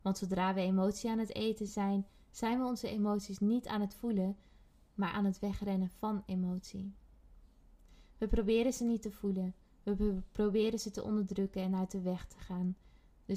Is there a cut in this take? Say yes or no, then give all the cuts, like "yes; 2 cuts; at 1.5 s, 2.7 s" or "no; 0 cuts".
no; 0 cuts